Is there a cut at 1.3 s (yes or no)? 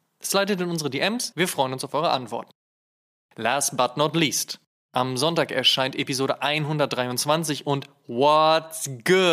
yes